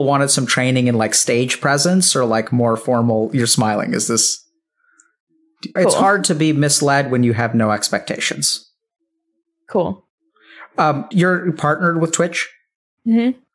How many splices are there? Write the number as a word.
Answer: two